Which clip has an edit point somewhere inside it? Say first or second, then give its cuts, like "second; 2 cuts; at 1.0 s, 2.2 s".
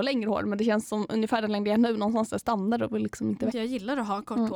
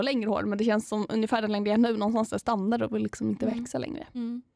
first; 1 cut; at 3.5 s